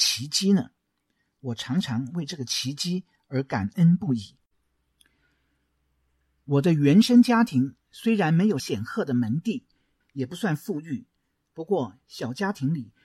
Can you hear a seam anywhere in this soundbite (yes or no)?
no